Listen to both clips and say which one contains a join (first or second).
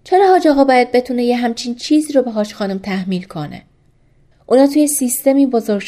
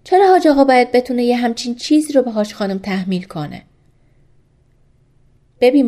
first